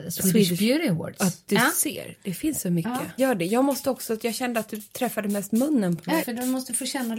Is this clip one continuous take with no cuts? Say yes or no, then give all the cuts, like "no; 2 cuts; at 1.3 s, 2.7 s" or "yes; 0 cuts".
no; 2 cuts; at 3.2 s, 6.2 s